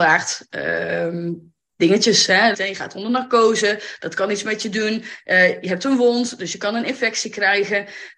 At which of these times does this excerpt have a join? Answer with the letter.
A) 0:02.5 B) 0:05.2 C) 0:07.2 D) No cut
A